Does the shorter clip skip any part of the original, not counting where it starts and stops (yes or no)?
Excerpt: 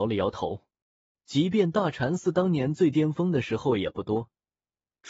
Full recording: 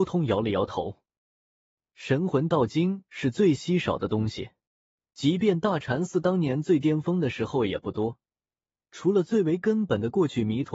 yes